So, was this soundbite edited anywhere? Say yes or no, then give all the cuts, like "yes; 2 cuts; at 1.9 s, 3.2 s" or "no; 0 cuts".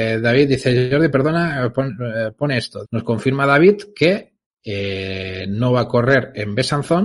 yes; 1 cut; at 2.8 s